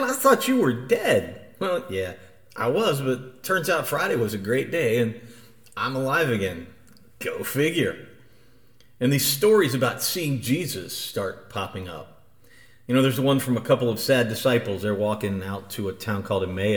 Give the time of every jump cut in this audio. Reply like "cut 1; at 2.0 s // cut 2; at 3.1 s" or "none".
none

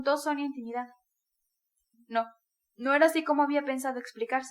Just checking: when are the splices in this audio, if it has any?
cut 1; at 1.9 s

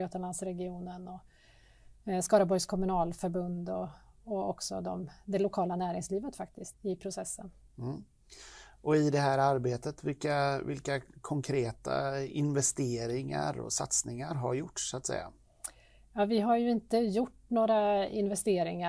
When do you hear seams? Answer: cut 1; at 6.7 s

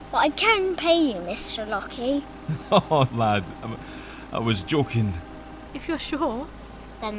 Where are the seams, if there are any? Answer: cut 1; at 3.1 s // cut 2; at 5.7 s

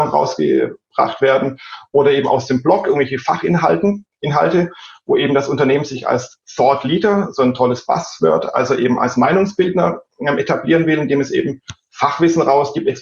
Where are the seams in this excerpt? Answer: none

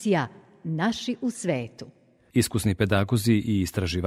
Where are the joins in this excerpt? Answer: cut 1; at 2.3 s

